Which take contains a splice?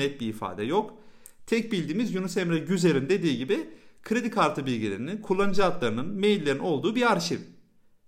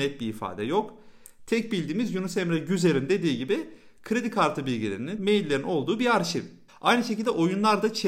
second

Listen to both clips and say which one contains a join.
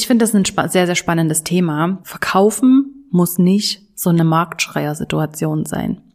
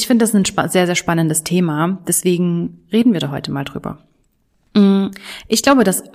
first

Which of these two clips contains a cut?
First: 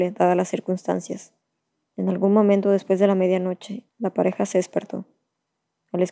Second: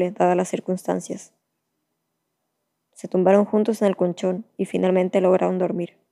first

